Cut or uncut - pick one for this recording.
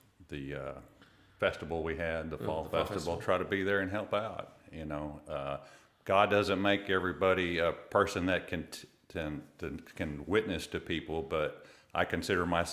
uncut